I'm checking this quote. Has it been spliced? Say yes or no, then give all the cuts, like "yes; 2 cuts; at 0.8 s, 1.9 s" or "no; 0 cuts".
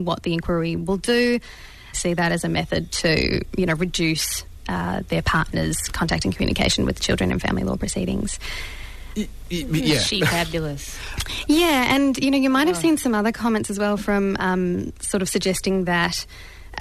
yes; 2 cuts; at 1.9 s, 14.9 s